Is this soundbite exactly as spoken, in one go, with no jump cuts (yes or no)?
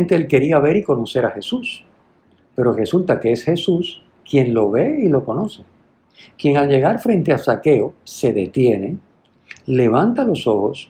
yes